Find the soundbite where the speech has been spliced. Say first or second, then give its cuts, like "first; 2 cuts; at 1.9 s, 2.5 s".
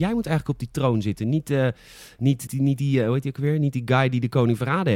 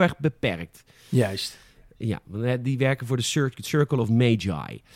first; 1 cut; at 2.5 s